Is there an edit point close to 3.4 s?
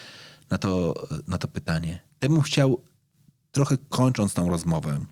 no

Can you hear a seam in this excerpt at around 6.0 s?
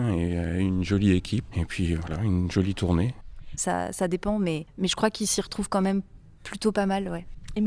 no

